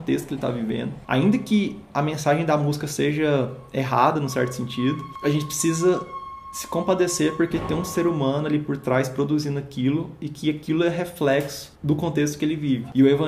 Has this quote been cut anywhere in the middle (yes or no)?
no